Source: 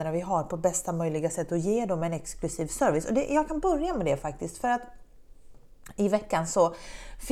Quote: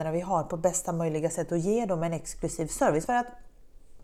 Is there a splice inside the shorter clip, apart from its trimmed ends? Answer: yes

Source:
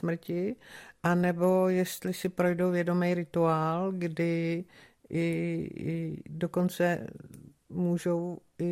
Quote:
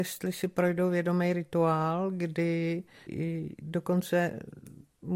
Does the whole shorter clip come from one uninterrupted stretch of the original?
no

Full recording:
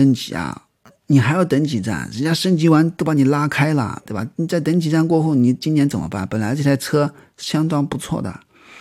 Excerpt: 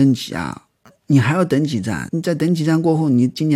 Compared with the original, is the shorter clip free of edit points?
no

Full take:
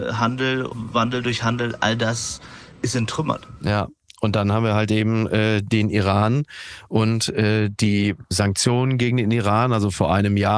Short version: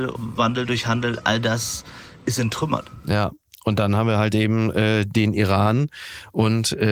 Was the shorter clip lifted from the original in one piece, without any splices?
yes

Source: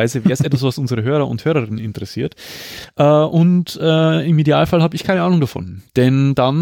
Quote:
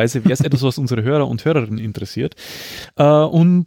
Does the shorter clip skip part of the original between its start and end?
no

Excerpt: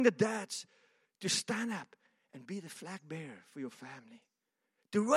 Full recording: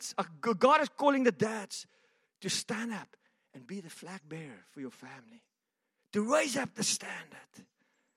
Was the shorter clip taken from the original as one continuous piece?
yes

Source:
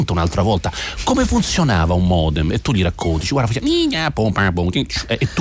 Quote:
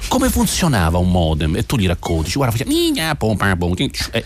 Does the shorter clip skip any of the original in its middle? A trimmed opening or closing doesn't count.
no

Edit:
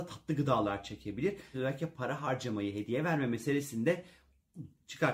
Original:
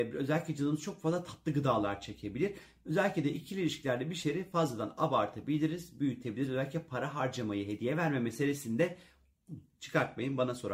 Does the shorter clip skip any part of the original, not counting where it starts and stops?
yes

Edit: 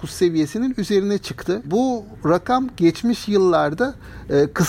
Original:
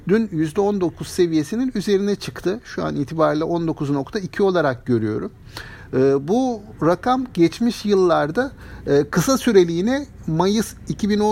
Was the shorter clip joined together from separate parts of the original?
yes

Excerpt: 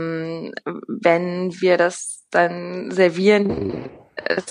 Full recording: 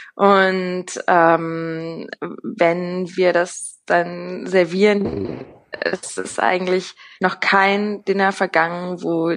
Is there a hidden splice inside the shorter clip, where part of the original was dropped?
no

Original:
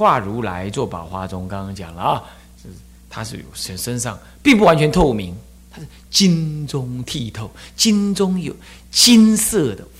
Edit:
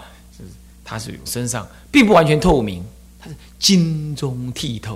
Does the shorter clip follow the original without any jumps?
no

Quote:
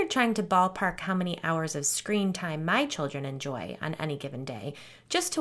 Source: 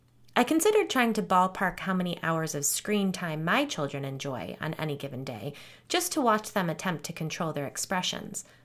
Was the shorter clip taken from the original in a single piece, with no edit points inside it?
yes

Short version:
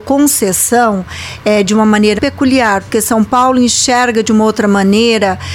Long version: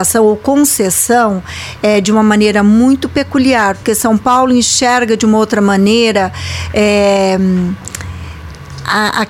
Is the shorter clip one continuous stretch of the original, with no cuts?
no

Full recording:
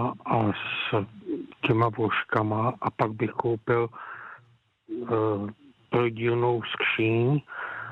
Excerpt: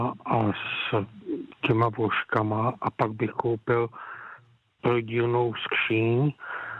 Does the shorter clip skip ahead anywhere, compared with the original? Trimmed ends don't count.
yes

